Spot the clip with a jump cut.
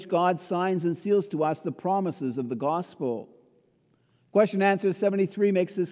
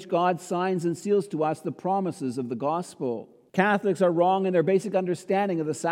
second; 1 cut; at 3.5 s

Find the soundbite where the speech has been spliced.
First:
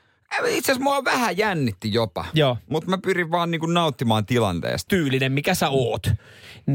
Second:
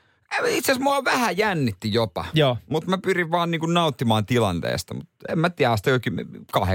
first; 1 cut; at 4.9 s

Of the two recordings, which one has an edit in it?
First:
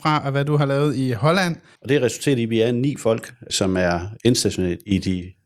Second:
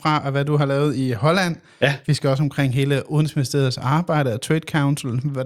first; 2 cuts; at 1.8 s, 3.5 s

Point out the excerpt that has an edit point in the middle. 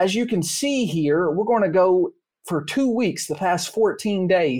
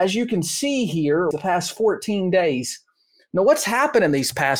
second; 1 cut; at 1.3 s

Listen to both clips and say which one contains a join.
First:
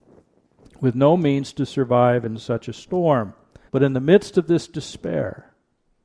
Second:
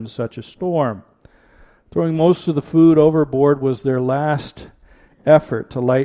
first; 1 cut; at 3.7 s

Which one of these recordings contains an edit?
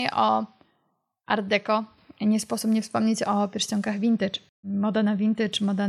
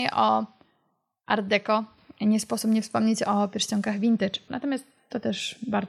second; 1 cut; at 4.5 s

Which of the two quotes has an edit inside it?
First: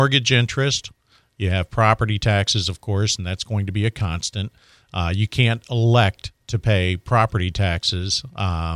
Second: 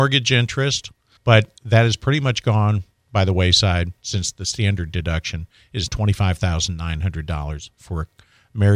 second; 2 cuts; at 1.2 s, 5.9 s

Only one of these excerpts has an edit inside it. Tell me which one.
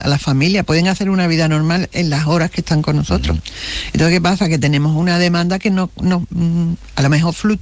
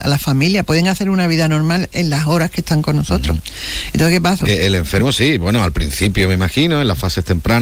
second; 1 cut; at 4.4 s

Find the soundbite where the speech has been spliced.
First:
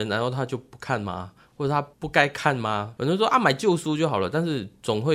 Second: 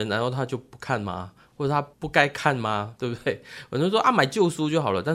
first; 1 cut; at 3.0 s

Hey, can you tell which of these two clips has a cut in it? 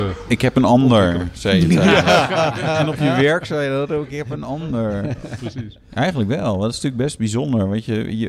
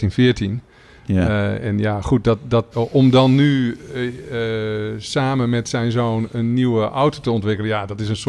second; 1 cut; at 2.7 s

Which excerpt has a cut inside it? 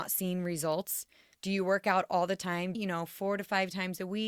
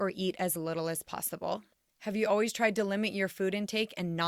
first; 2 cuts; at 1.3 s, 2.7 s

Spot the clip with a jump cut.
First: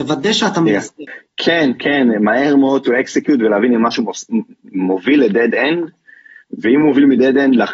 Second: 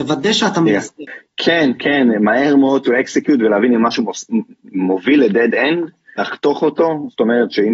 second; 1 cut; at 6.2 s

